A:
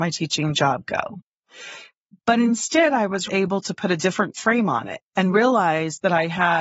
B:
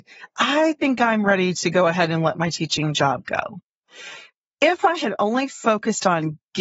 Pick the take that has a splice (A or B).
A